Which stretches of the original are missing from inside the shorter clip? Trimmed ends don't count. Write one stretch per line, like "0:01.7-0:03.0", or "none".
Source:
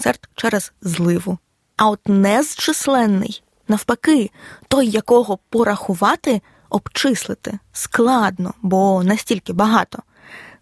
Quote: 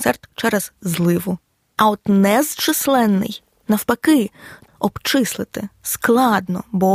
0:04.7-0:06.6